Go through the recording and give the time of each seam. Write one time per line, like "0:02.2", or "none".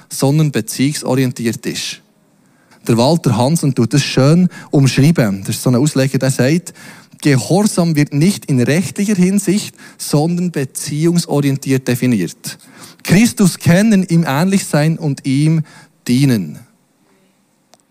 0:02.7